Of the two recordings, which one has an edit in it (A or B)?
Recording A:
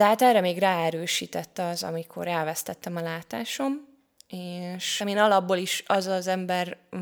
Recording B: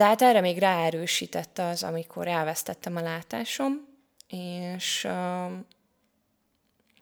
A